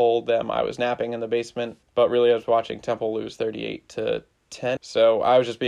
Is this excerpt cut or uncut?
cut